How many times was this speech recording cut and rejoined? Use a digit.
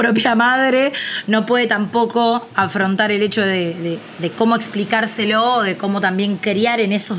0